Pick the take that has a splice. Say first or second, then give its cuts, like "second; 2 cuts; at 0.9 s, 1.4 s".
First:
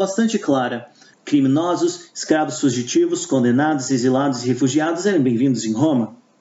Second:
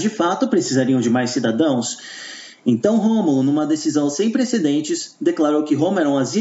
first; 1 cut; at 1.1 s